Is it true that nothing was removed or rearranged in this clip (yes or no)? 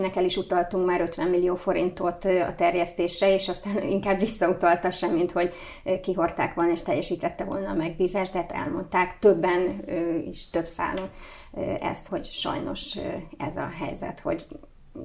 no